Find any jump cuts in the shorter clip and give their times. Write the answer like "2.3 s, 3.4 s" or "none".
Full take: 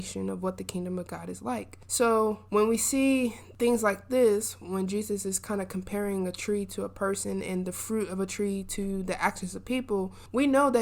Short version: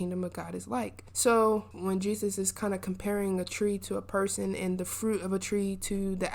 1.7 s